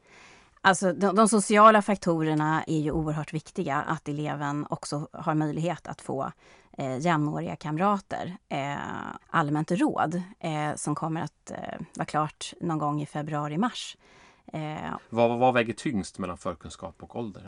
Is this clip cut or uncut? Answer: cut